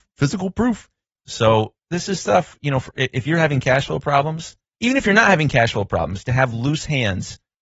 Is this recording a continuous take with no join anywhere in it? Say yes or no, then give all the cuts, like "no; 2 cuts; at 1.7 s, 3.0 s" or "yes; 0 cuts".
no; 1 cut; at 1.2 s